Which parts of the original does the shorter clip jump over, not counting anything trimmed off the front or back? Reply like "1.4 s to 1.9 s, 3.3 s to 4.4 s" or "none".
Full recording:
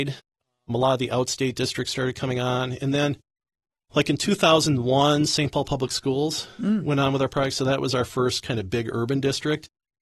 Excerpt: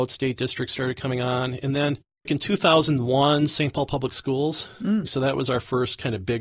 3.4 s to 4.0 s, 6.8 s to 7.5 s